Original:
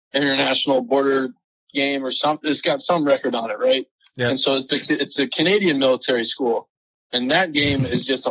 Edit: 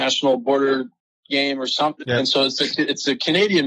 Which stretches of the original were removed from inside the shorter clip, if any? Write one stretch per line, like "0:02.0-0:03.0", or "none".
0:02.4-0:04.1